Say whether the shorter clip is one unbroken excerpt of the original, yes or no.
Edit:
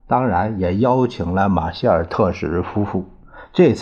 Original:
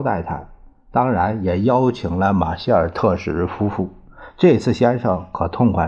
yes